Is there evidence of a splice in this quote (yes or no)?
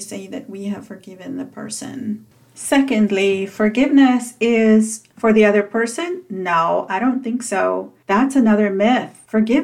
no